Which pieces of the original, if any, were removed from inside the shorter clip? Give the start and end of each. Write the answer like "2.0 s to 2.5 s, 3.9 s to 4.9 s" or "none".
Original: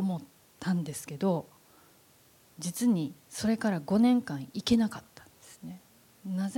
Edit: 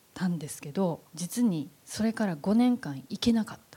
1.5 s to 2.5 s